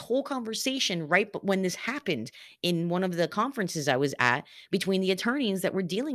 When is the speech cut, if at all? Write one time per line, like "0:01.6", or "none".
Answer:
none